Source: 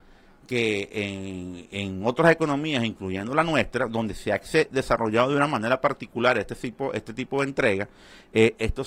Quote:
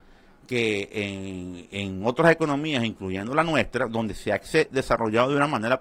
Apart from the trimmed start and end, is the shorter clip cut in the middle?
no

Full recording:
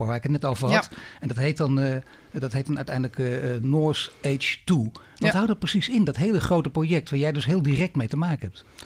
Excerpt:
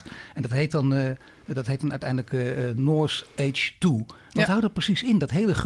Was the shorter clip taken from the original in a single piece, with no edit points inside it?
yes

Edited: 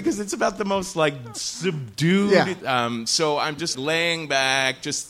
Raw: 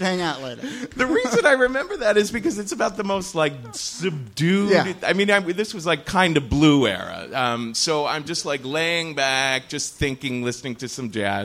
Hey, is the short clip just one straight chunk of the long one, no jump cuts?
no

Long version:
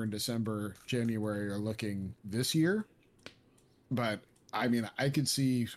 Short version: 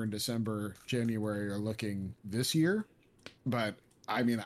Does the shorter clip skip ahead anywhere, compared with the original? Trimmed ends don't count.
yes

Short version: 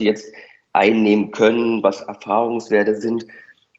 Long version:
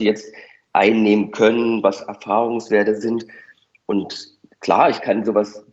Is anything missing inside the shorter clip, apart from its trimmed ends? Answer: no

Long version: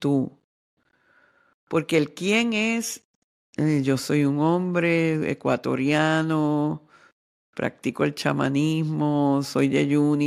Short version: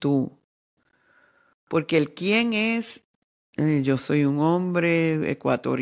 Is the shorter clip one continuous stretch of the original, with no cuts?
yes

